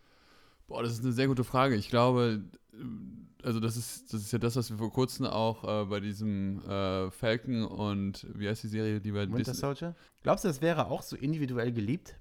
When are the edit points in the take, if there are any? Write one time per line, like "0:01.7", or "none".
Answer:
0:10.1